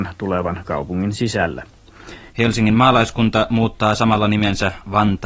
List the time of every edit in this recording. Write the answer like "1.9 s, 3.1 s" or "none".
2.3 s